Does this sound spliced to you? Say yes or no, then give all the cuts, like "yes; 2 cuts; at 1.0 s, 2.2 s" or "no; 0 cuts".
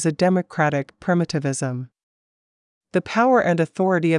no; 0 cuts